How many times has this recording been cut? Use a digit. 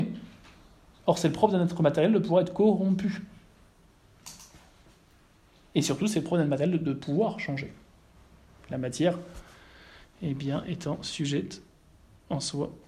0